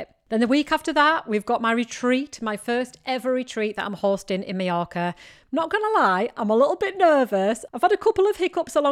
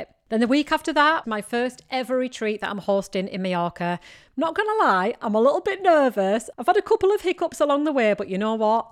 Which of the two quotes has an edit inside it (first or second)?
second